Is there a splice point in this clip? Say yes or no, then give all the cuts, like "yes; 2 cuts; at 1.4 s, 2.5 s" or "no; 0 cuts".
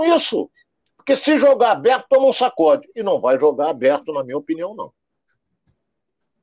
no; 0 cuts